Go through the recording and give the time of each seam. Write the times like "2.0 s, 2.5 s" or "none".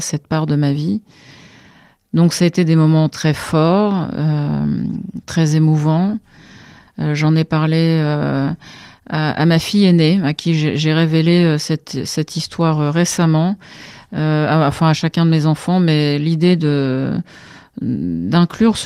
6.9 s